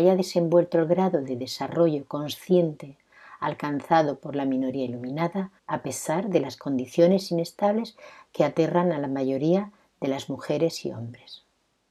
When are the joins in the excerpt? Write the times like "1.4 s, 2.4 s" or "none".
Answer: 5.6 s